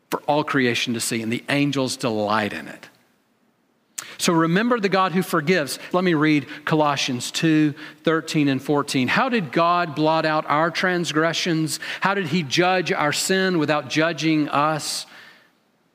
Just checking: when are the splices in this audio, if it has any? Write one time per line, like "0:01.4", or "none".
0:05.9